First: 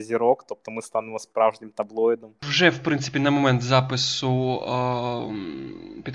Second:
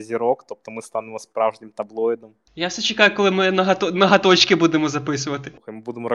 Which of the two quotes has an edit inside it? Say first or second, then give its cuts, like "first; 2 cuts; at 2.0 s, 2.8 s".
first; 1 cut; at 2.4 s